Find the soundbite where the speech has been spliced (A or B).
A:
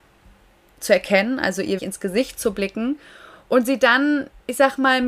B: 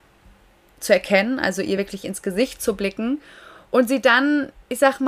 A